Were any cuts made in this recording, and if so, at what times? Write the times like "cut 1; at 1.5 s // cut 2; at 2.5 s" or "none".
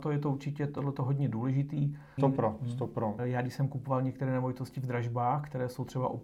cut 1; at 2.2 s // cut 2; at 3.2 s